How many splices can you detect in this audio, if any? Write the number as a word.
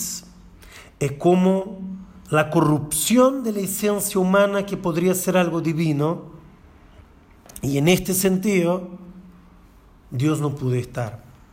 zero